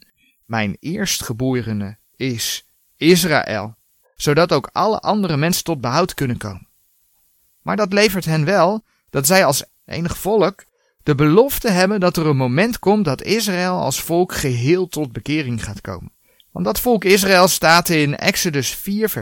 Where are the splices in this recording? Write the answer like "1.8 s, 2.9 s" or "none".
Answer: 4.0 s, 16.4 s